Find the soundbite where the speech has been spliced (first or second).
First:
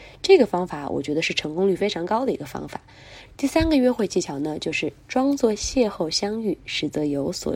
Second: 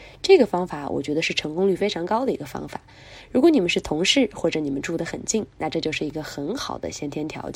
first